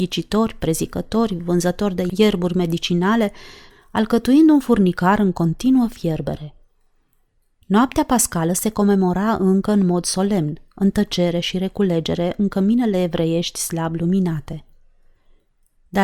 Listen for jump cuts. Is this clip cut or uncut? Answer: cut